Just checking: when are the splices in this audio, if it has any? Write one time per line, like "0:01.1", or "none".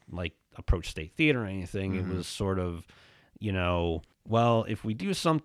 0:04.1